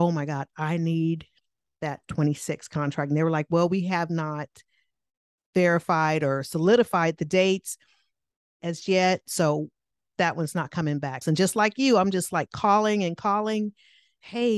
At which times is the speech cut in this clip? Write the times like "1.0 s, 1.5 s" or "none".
11.2 s